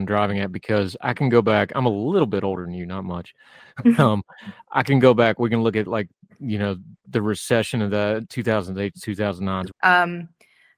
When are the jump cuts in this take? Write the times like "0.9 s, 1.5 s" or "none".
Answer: 9.7 s